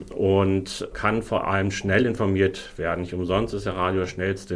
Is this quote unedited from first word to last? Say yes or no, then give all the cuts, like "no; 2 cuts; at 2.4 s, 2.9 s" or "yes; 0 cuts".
no; 1 cut; at 0.9 s